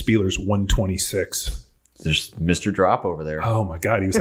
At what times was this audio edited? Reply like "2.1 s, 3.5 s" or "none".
none